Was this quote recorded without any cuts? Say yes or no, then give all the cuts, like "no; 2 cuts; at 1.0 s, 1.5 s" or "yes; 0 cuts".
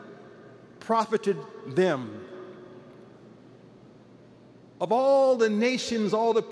yes; 0 cuts